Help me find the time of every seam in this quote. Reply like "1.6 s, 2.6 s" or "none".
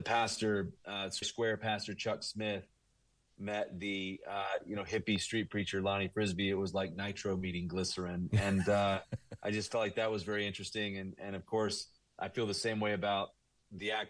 1.2 s

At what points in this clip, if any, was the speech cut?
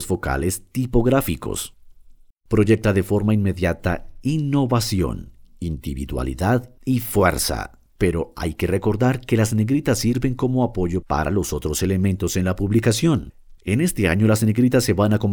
2.3 s

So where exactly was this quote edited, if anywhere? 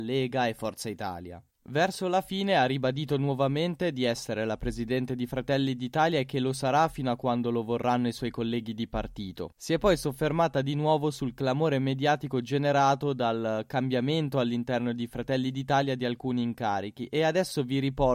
none

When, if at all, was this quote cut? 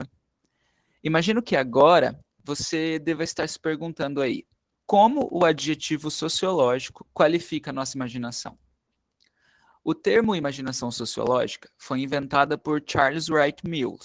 4.8 s

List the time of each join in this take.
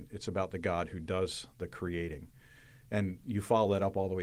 none

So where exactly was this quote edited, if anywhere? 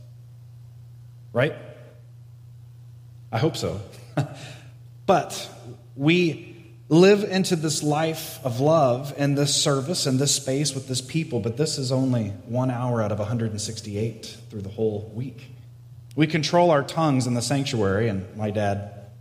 16.1 s

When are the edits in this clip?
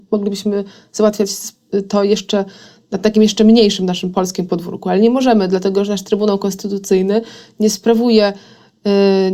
none

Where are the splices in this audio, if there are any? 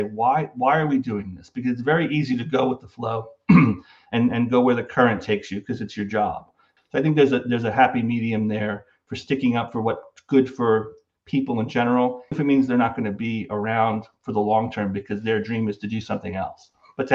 6.8 s, 12.3 s

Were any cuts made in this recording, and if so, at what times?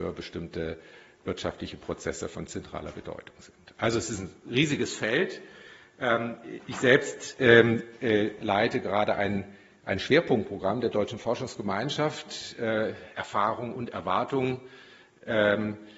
none

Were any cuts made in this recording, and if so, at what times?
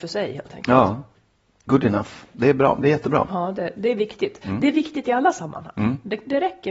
none

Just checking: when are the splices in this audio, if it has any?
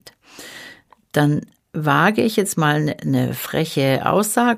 none

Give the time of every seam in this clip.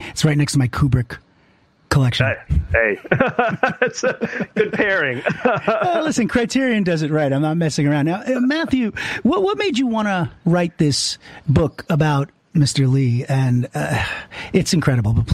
none

